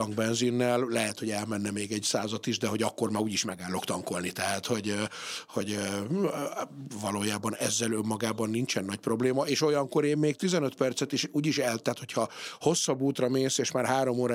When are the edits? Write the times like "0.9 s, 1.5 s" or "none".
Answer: none